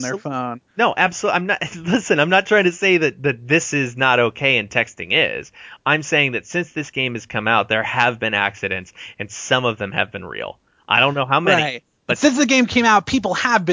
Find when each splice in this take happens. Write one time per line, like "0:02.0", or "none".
none